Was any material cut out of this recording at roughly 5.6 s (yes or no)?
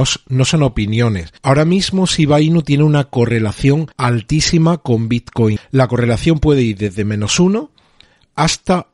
yes